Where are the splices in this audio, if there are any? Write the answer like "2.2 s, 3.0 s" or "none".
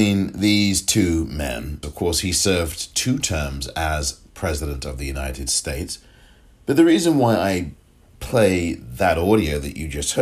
1.8 s